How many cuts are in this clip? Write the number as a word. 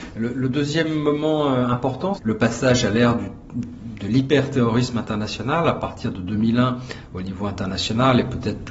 one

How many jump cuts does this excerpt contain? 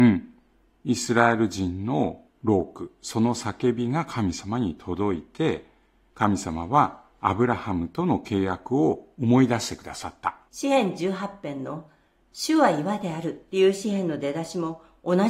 one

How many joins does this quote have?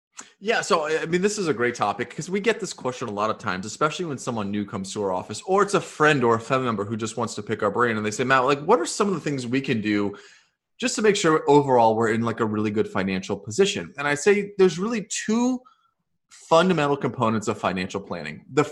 zero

